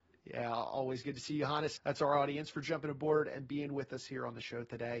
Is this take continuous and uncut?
no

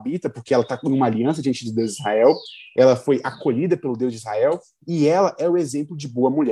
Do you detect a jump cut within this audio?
no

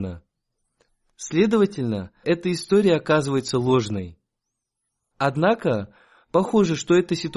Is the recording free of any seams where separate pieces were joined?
no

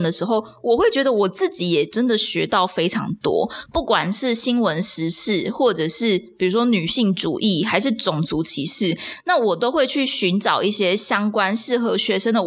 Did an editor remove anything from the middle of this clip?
no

